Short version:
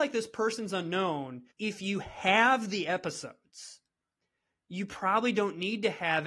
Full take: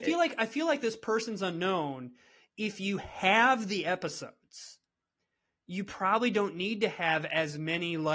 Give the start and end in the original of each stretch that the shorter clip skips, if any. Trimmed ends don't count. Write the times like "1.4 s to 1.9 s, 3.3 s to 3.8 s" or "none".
2.2 s to 2.5 s